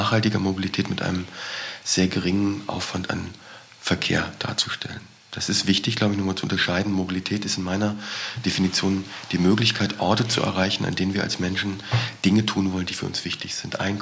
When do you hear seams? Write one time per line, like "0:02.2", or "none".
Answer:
none